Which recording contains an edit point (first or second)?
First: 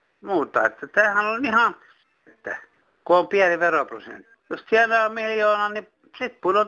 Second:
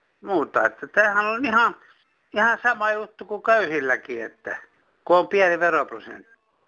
first